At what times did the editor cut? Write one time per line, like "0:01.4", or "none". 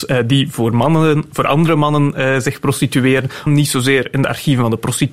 0:03.5

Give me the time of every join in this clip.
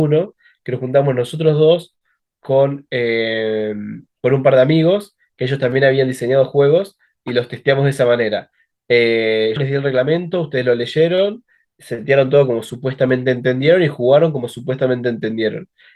0:09.6

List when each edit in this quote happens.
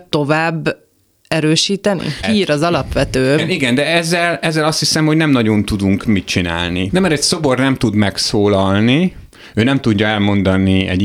0:02.2
0:03.4
0:06.9

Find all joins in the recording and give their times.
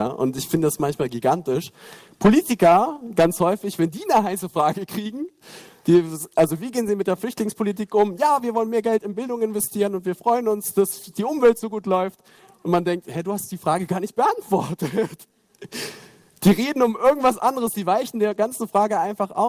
none

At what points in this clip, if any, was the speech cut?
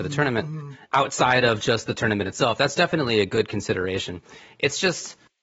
none

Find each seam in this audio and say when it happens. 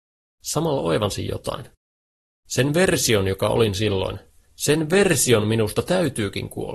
none

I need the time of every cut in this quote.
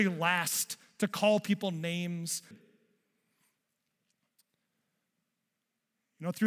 0:02.5

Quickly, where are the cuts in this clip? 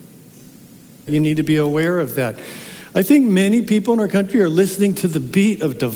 0:01.1

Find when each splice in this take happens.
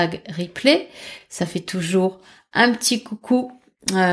none

